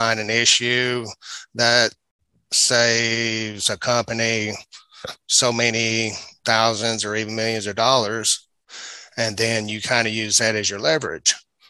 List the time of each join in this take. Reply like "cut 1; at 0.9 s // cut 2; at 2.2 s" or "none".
none

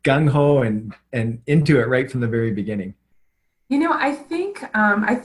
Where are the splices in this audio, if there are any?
none

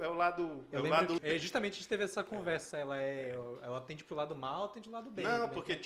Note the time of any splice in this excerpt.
cut 1; at 1.2 s // cut 2; at 2.7 s

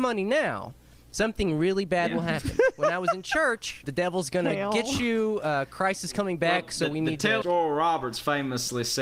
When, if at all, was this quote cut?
cut 1; at 3.8 s // cut 2; at 7.4 s

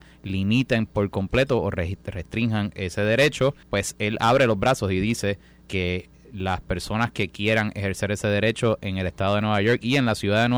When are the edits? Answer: cut 1; at 3.6 s // cut 2; at 5.6 s

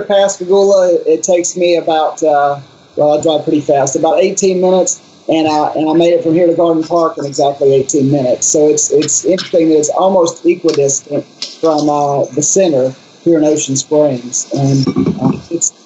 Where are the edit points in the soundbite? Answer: cut 1; at 14.8 s

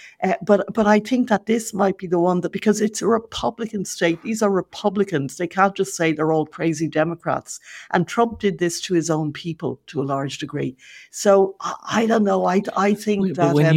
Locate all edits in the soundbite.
none

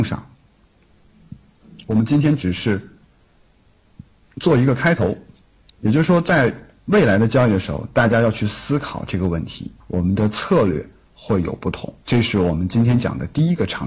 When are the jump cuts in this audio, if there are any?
cut 1; at 9.8 s // cut 2; at 12.0 s

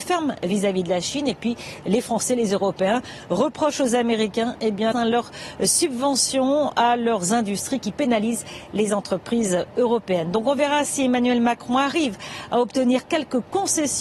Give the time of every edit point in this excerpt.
cut 1; at 4.9 s

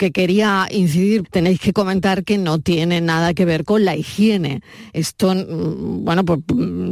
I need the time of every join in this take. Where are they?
cut 1; at 1.2 s

